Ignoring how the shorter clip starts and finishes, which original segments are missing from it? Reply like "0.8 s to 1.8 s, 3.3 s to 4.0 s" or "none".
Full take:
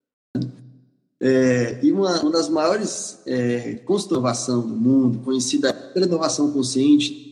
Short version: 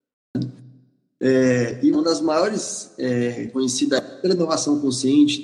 1.9 s to 2.2 s, 3.8 s to 5.2 s